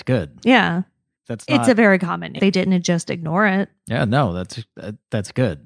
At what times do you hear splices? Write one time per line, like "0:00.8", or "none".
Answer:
0:01.2
0:02.4